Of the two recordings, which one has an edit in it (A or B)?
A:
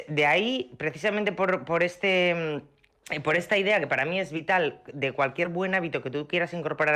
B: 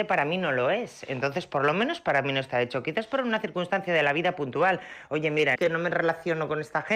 B